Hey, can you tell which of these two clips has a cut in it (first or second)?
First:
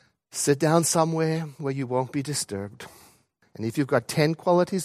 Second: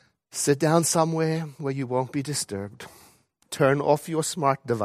first